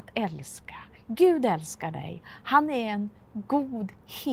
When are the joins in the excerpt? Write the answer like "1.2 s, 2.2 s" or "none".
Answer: 2.2 s